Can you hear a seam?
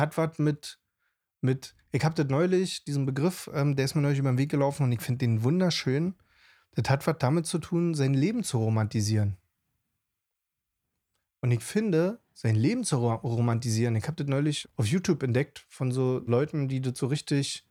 yes; 2 cuts; at 14.6 s, 16.3 s

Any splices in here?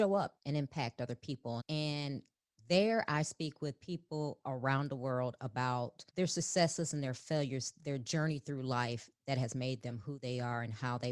yes; 2 cuts; at 1.6 s, 6.1 s

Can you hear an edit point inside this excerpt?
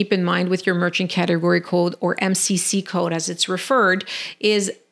no; 0 cuts

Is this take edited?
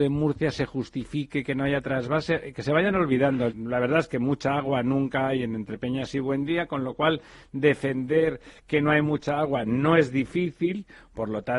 yes; 1 cut; at 3.5 s

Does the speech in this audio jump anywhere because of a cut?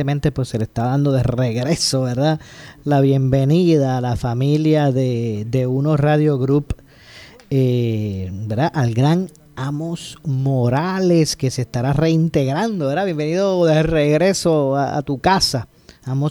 no; 0 cuts

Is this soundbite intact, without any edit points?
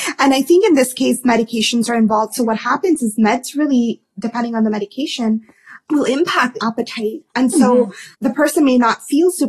no; 1 cut; at 8.1 s

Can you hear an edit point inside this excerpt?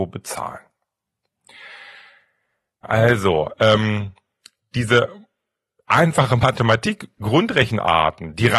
yes; 1 cut; at 2.8 s

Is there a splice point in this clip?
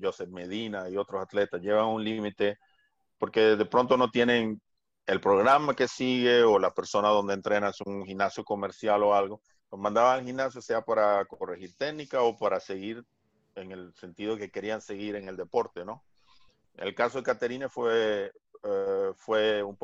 yes; 1 cut; at 9.6 s

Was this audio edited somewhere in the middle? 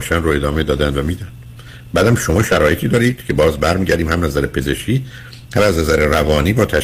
no; 0 cuts

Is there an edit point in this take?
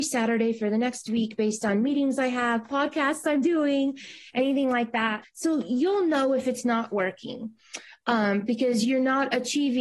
yes; 1 cut; at 5.2 s

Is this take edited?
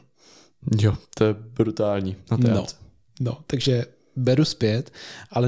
no; 0 cuts

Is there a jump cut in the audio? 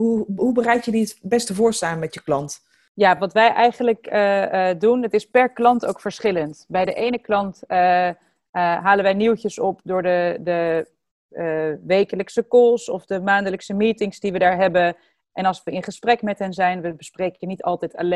no; 0 cuts

